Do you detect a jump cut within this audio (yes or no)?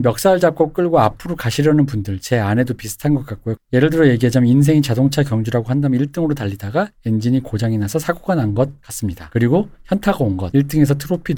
yes